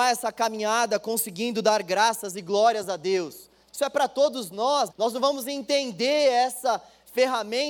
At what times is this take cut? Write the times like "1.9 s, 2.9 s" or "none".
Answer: 3.6 s, 4.9 s

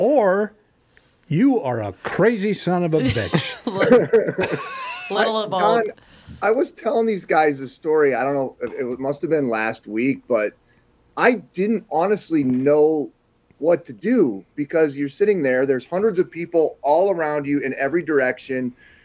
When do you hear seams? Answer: none

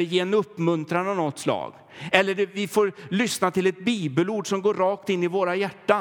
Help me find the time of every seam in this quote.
none

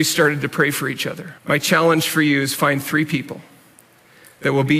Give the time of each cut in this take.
1.4 s

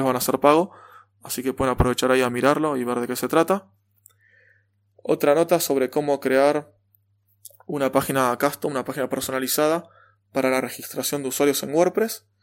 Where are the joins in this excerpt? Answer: none

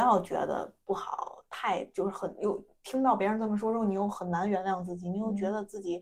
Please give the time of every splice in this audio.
none

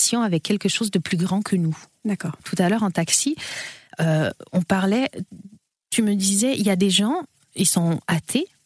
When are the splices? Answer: 2.4 s

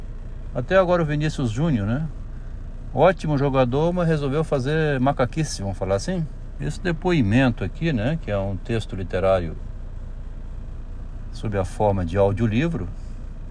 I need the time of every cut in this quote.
6.6 s

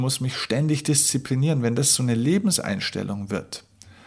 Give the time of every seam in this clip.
none

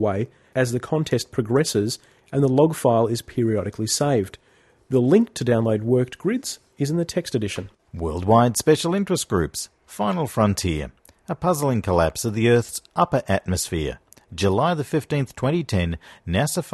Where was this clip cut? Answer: none

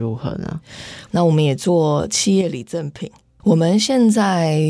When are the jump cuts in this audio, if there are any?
1.1 s, 3.4 s

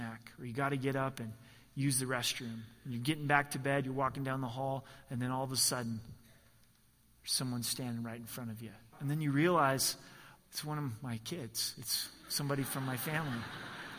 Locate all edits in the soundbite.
8.9 s, 10.4 s

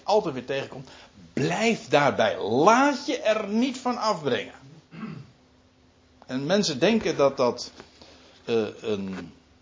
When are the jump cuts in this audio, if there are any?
none

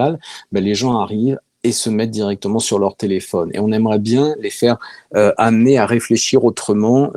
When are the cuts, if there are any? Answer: none

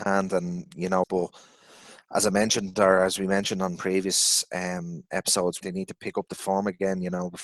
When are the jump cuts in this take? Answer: 1.0 s, 5.6 s

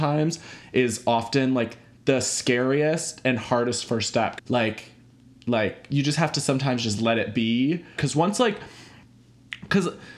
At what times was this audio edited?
4.4 s, 8.0 s

